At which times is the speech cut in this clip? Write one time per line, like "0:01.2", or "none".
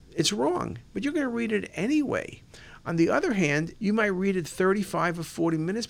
0:03.8